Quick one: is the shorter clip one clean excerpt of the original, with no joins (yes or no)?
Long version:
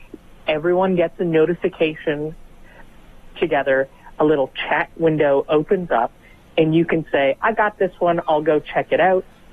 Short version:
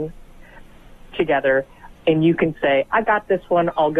no